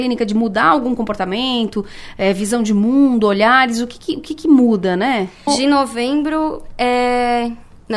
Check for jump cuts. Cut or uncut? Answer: cut